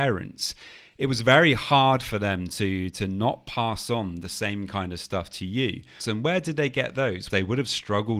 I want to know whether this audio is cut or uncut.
cut